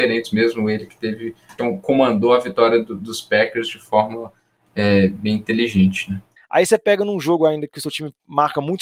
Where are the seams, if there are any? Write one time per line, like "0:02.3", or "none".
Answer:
0:01.6
0:06.4